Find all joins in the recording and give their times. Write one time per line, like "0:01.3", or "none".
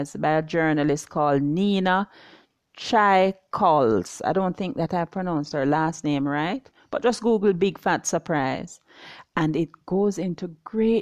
none